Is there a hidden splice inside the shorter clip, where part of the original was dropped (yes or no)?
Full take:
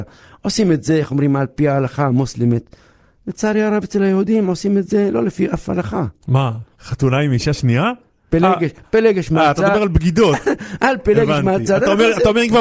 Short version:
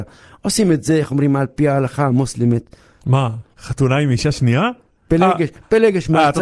yes